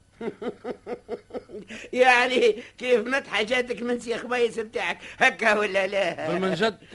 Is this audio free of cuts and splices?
yes; 0 cuts

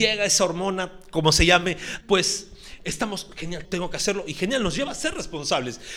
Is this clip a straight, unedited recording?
no; 2 cuts; at 2.0 s, 3.6 s

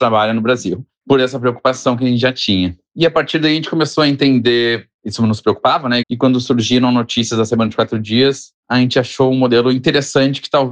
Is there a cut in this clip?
yes; 1 cut; at 6.0 s

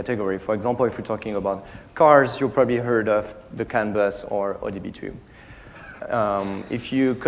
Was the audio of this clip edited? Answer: yes; 1 cut; at 6.0 s

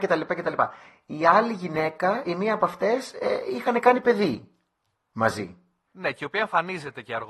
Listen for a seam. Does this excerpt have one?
no; 0 cuts

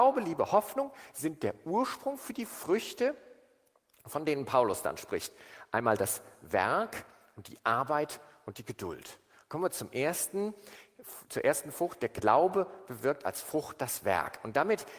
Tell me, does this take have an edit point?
no; 0 cuts

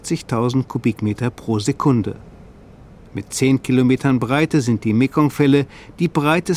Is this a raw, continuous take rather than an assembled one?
yes; 0 cuts

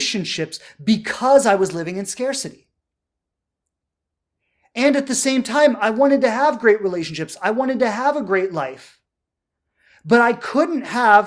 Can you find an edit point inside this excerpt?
no; 0 cuts

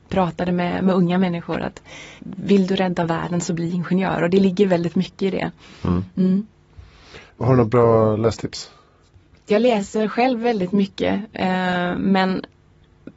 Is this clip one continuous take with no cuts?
no; 1 cut; at 2.2 s

